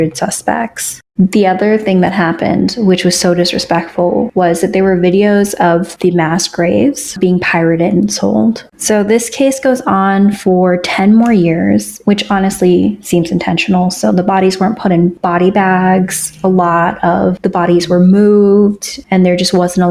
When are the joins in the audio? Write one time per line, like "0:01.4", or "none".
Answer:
0:01.2
0:08.7
0:12.0

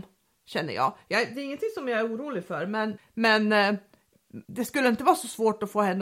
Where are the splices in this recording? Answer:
0:03.0
0:04.4

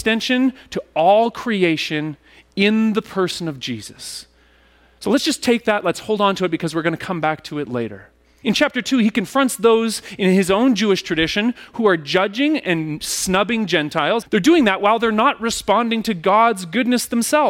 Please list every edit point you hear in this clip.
0:08.4
0:14.2

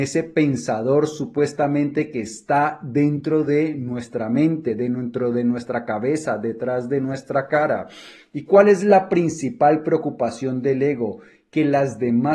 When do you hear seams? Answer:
none

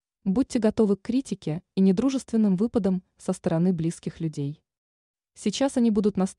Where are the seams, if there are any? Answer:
none

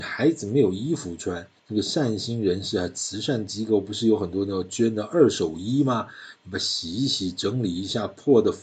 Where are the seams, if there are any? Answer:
0:01.6

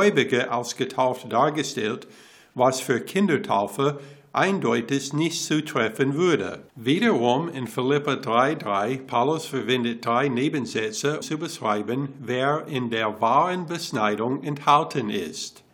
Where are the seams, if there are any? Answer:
0:06.7
0:11.2

